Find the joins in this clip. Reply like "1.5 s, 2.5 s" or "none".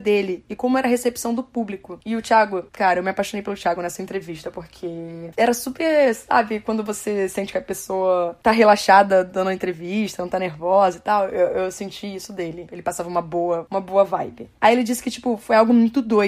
none